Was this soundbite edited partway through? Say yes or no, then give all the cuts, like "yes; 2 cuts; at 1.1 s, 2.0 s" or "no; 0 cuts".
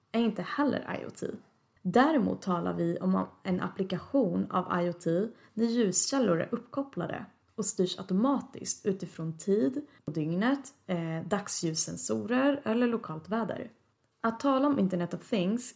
no; 0 cuts